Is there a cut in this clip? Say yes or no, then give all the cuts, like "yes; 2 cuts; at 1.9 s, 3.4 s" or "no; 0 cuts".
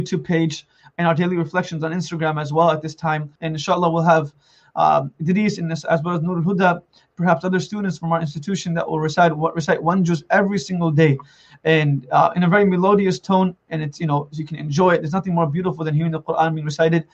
yes; 1 cut; at 3.4 s